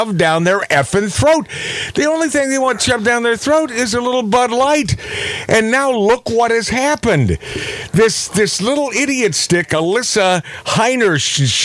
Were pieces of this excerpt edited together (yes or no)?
no